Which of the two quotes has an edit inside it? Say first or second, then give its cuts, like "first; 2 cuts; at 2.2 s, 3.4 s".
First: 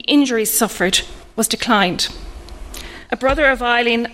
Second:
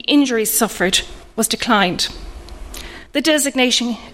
first; 1 cut; at 3.1 s